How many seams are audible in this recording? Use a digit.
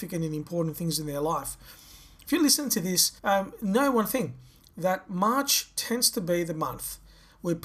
1